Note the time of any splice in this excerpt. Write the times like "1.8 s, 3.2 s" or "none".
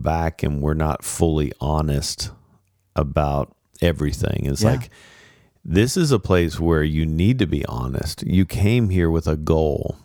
none